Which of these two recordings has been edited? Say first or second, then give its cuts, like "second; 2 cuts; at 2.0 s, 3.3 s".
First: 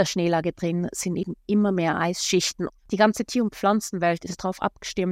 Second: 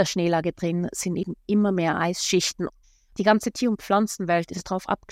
first; 1 cut; at 2.8 s